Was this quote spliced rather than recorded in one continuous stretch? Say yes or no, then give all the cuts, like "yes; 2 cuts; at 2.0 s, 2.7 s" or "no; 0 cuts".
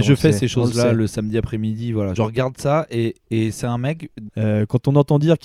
yes; 2 cuts; at 2.2 s, 4.3 s